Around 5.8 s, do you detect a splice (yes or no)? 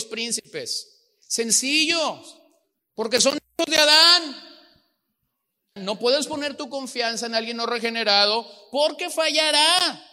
yes